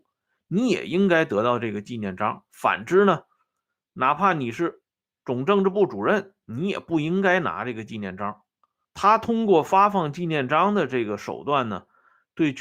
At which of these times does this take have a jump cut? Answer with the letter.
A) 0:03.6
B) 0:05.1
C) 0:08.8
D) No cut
C